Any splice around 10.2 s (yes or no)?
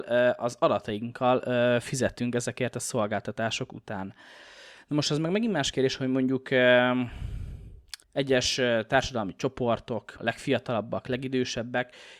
yes